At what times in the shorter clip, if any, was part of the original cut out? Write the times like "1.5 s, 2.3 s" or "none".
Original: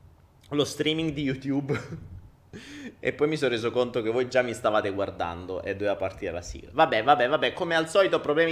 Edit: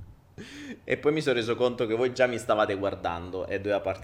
none